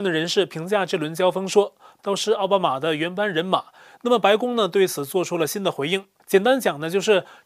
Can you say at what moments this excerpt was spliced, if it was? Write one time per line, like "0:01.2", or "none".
0:02.0
0:03.9
0:06.2